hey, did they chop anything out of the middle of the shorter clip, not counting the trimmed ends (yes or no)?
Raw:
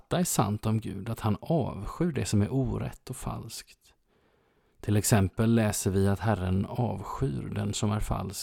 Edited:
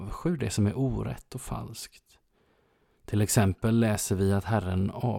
no